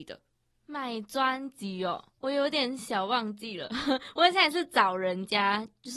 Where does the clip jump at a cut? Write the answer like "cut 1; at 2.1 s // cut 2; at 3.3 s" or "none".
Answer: cut 1; at 2.2 s